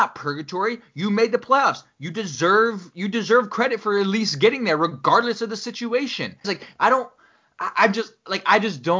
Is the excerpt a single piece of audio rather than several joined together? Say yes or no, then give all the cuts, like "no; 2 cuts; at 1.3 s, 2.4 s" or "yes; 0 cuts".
no; 1 cut; at 6.4 s